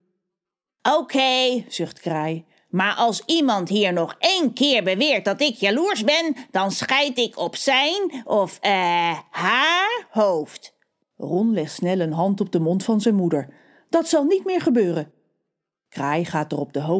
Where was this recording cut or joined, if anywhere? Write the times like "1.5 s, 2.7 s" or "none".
none